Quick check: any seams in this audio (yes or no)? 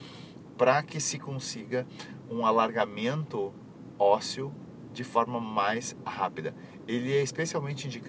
no